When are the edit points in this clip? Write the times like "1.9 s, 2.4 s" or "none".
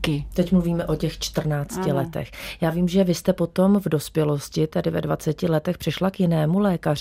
none